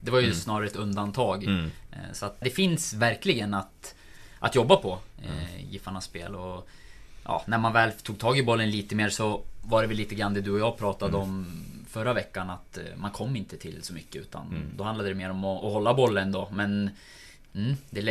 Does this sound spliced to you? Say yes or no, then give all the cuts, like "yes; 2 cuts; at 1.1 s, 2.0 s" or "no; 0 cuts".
yes; 1 cut; at 2.4 s